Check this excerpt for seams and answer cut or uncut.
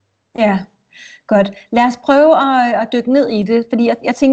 uncut